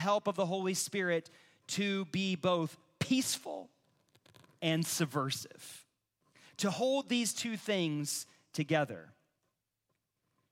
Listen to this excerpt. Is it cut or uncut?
uncut